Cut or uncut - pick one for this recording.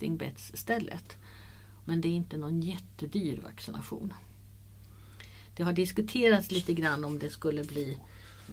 cut